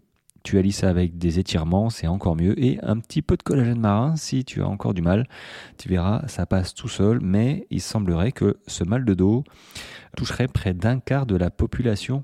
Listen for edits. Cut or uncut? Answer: cut